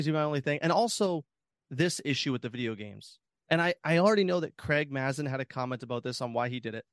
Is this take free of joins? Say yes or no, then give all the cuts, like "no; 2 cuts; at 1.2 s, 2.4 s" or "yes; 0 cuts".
yes; 0 cuts